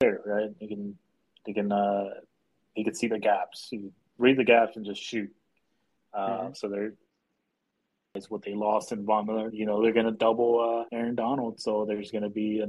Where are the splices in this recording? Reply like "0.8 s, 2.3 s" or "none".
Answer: 9.5 s, 10.9 s

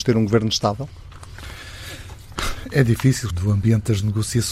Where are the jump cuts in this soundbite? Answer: 3.3 s

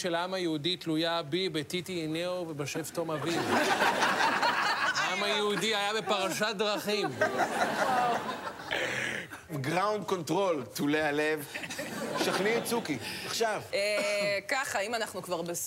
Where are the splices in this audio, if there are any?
none

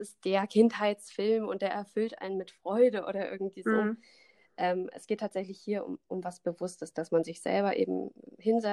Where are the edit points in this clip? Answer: none

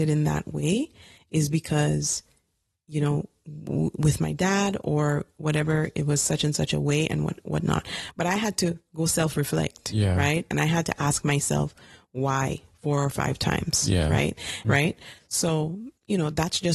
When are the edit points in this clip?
14.6 s

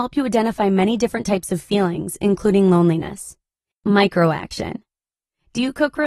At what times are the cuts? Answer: 3.7 s

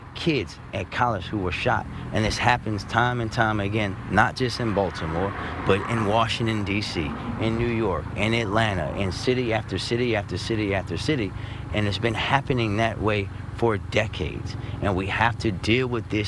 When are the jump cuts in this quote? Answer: none

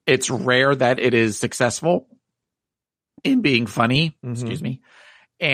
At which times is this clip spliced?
none

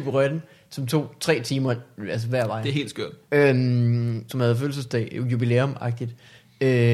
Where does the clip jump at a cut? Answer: 3.2 s, 4.3 s

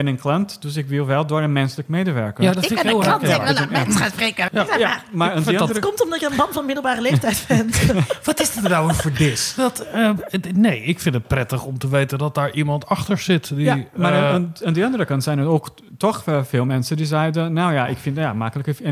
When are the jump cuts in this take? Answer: 4.5 s

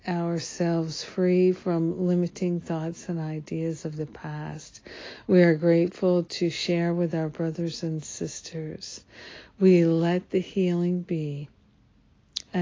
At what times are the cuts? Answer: none

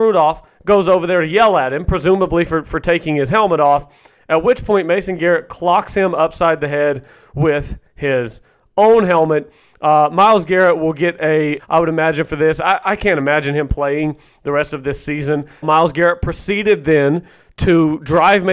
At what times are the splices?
11.6 s, 15.6 s

